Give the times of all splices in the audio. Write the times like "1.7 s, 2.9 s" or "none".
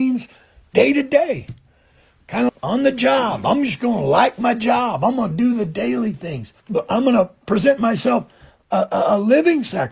2.5 s, 6.6 s

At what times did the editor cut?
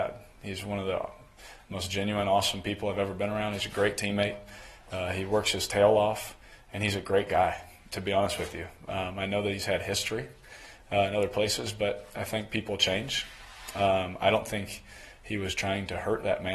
none

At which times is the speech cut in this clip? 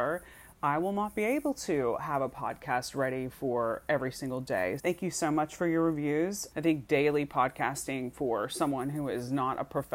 4.8 s, 6.5 s

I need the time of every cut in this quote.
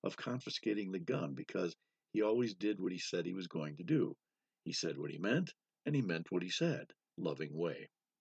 7.1 s

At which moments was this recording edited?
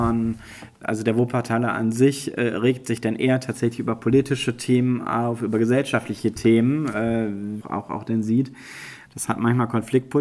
7.6 s, 9.1 s

